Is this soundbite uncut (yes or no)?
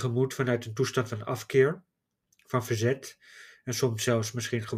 yes